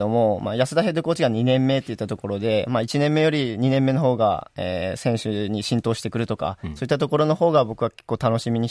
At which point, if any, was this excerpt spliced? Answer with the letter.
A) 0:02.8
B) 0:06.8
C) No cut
C